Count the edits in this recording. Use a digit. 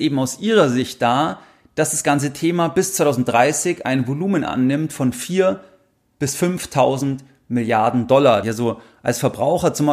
1